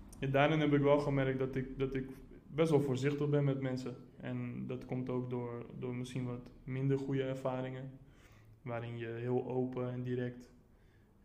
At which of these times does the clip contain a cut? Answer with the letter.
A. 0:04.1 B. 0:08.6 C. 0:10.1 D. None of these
D